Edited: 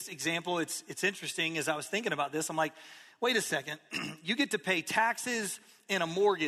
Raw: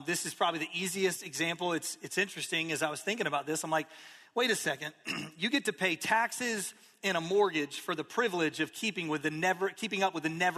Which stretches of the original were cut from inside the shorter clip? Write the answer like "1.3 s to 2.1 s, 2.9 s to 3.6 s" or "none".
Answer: none